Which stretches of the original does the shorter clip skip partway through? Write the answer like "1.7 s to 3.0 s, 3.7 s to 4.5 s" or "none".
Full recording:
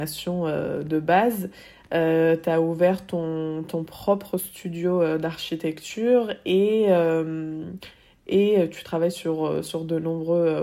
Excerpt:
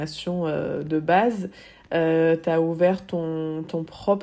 none

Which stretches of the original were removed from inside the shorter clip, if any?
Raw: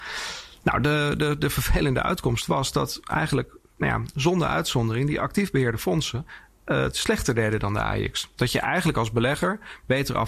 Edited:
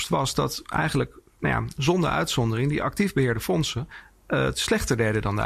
none

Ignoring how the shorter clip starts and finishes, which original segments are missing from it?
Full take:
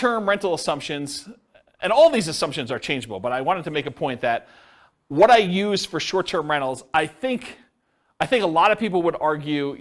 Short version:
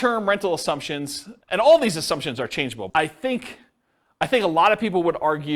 1.4 s to 1.7 s, 3.2 s to 6.9 s

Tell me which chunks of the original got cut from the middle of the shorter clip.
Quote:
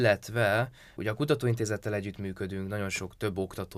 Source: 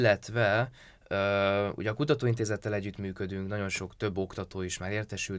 1.0 s to 1.8 s

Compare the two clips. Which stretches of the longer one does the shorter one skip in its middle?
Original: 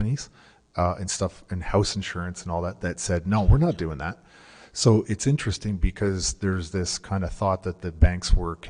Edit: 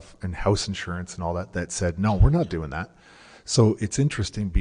none

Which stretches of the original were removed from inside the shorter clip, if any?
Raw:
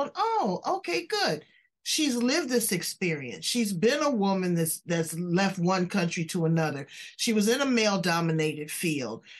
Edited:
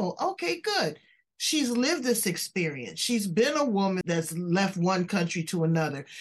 4.5 s to 4.8 s

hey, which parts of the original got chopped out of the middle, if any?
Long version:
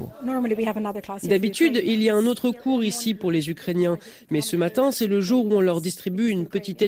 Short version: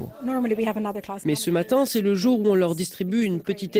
1.2 s to 4.3 s

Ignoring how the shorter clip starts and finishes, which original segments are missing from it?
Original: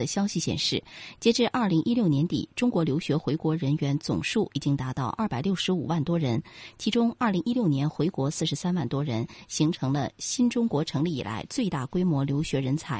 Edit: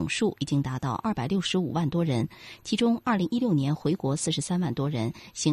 none

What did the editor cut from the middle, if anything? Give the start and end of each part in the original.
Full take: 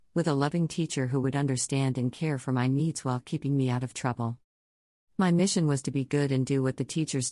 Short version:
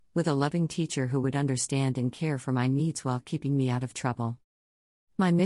none

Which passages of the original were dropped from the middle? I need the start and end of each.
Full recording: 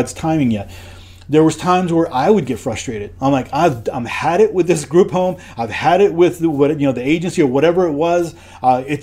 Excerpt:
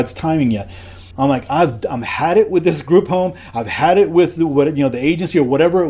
1.1 s to 3.1 s

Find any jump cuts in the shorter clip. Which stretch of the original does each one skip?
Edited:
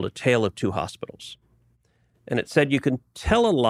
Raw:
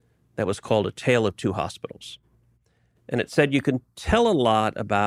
none

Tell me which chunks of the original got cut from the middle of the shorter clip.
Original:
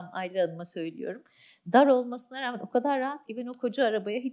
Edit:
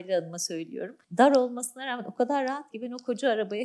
1.3 s to 1.6 s

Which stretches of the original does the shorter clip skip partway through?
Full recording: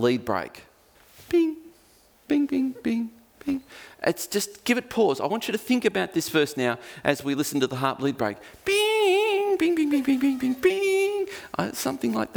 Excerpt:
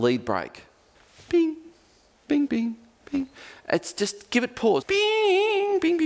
2.5 s to 2.8 s, 5.2 s to 8.6 s

